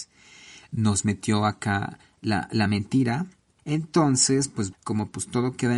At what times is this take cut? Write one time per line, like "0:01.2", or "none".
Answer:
0:03.6
0:04.7